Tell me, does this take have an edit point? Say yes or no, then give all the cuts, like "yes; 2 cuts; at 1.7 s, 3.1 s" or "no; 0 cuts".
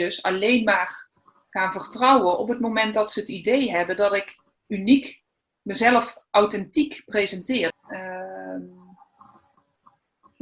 yes; 1 cut; at 7.7 s